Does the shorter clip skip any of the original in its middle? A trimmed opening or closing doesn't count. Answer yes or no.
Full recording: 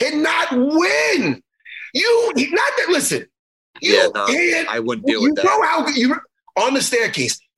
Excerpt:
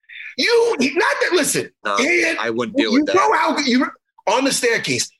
yes